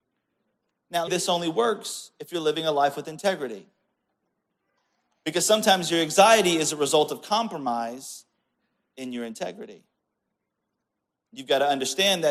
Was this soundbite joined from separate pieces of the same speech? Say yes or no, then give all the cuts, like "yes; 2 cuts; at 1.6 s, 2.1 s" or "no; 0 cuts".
yes; 1 cut; at 1.1 s